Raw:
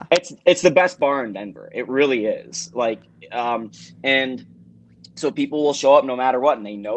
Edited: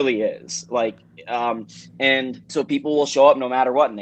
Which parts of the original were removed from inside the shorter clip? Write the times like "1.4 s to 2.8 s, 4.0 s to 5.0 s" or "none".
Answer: 4.5 s to 5.1 s